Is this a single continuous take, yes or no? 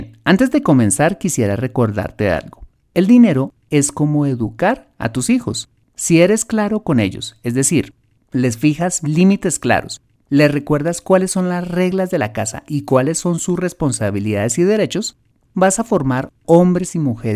yes